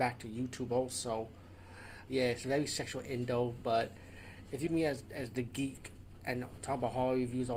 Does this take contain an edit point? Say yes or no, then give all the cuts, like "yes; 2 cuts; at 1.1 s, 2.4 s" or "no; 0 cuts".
yes; 2 cuts; at 2.1 s, 4.7 s